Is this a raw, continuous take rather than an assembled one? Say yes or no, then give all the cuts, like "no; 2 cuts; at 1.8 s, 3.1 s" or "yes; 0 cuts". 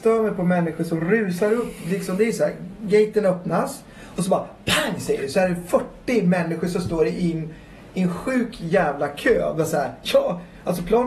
yes; 0 cuts